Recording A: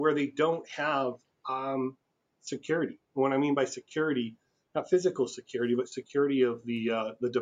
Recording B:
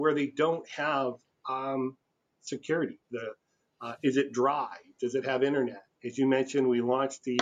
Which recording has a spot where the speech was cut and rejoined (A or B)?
B